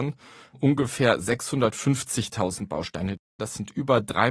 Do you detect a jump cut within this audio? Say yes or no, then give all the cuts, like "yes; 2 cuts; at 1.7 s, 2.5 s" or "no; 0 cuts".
yes; 1 cut; at 3.4 s